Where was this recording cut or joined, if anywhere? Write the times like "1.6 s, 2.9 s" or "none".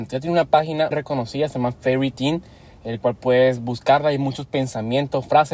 0.9 s